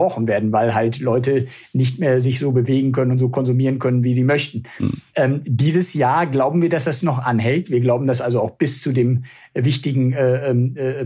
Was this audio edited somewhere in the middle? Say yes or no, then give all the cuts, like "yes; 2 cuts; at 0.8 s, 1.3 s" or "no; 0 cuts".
no; 0 cuts